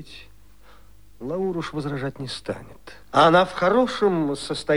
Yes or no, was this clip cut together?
yes